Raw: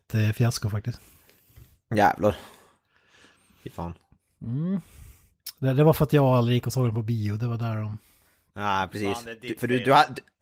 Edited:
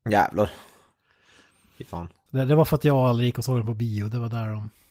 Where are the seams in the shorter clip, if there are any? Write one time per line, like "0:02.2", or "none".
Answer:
0:02.3